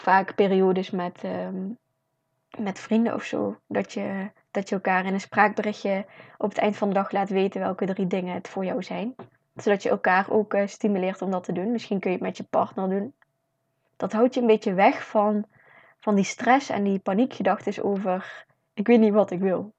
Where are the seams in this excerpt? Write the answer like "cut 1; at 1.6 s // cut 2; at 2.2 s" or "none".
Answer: cut 1; at 13.8 s

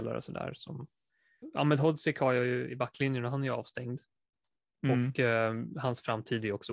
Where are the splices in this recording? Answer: cut 1; at 1.4 s

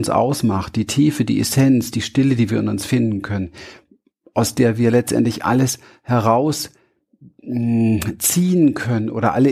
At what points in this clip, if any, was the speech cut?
none

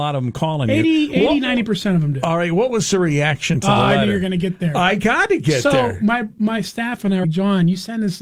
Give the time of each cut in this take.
cut 1; at 7.2 s

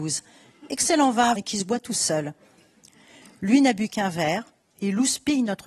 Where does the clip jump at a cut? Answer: cut 1; at 1.4 s // cut 2; at 4.7 s

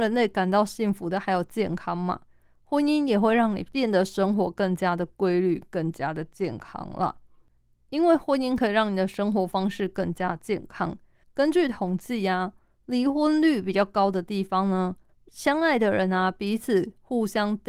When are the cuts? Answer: cut 1; at 11.2 s // cut 2; at 15.2 s

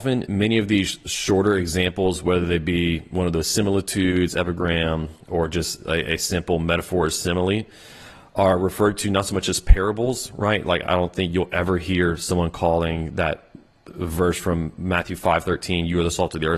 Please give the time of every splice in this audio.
none

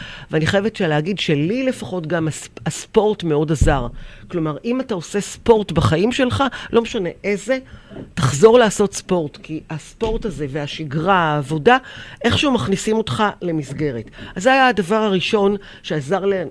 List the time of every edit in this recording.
none

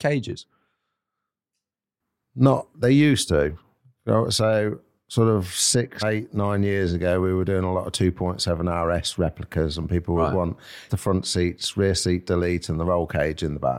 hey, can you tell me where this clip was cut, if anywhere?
cut 1; at 6.0 s // cut 2; at 10.9 s

